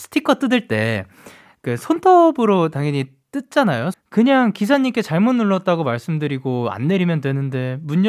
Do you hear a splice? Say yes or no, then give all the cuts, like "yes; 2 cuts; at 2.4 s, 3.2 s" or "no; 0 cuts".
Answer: yes; 1 cut; at 3.9 s